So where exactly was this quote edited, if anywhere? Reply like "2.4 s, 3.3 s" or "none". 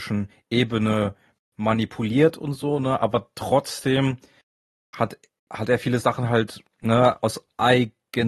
none